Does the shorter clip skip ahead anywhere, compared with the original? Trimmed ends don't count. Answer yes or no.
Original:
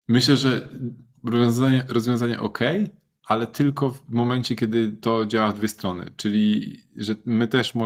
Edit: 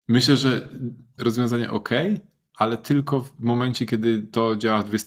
yes